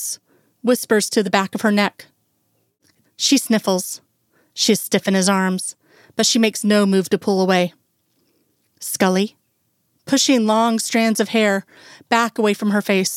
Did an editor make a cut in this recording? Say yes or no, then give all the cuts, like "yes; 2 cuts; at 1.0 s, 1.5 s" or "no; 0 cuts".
yes; 2 cuts; at 3.0 s, 9.9 s